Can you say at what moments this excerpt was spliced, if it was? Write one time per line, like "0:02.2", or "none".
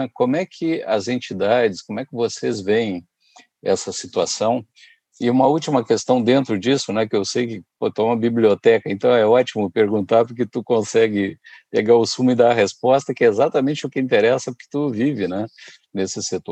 none